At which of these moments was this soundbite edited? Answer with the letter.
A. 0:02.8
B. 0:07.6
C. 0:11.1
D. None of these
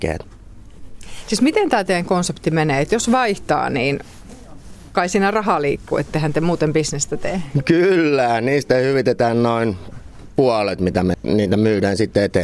C